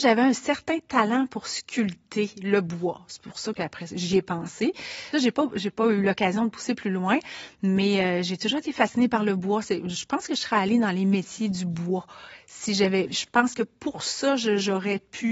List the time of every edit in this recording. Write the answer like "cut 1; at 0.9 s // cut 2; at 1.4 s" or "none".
cut 1; at 5.1 s